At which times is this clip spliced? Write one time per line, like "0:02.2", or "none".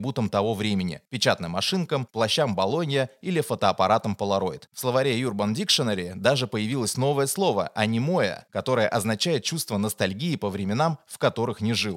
none

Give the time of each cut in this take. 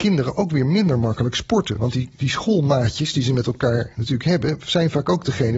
none

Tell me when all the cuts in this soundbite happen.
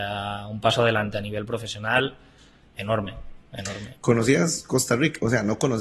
0:03.9

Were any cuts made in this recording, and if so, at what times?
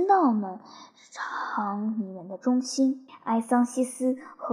0:03.1

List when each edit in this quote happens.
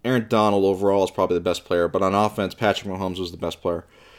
none

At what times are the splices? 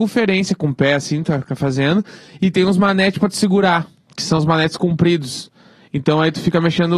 none

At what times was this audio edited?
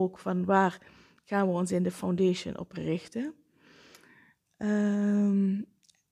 none

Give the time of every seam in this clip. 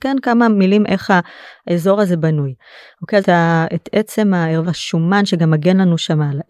0:03.2
0:04.6

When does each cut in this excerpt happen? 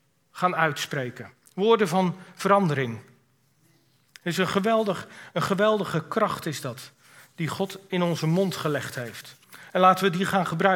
none

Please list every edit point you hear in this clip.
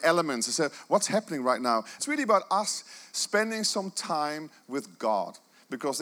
0:02.0

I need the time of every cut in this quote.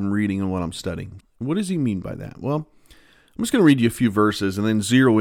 0:01.2

